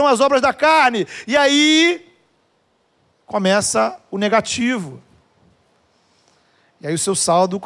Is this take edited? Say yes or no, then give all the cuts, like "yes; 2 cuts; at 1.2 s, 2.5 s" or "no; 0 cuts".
no; 0 cuts